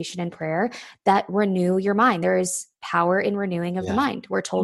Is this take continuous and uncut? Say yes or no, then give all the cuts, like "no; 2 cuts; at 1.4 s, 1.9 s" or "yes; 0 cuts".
yes; 0 cuts